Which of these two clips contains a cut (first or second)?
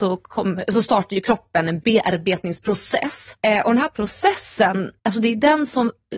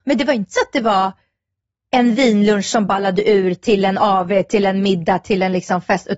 first